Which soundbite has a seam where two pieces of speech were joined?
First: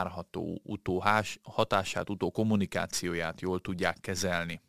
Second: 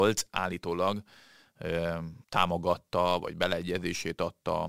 second; 1 cut; at 2.2 s

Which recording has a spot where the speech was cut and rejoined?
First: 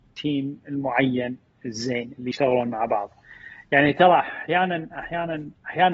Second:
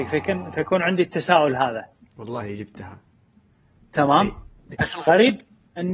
second; 1 cut; at 4.7 s

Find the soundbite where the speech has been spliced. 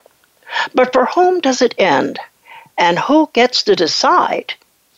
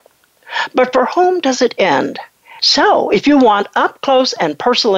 second; 1 cut; at 2.6 s

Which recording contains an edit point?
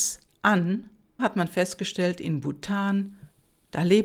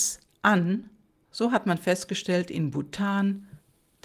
first; 1 cut; at 1.2 s

